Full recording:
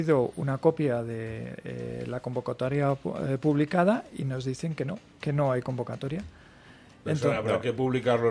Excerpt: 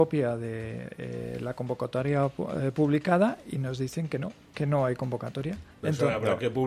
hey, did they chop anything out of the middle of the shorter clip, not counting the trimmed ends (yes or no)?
yes